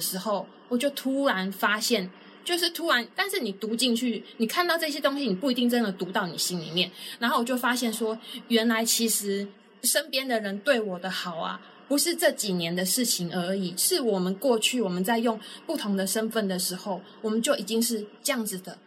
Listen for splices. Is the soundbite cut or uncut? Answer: cut